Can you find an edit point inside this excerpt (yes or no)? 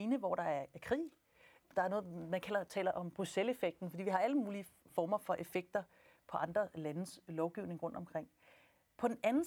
yes